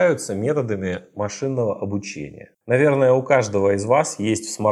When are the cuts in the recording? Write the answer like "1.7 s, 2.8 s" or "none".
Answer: none